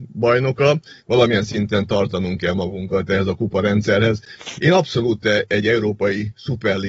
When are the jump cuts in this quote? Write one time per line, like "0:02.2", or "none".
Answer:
0:01.0
0:04.6